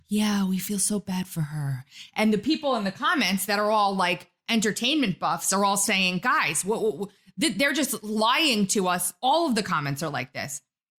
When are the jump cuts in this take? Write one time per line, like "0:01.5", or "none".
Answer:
none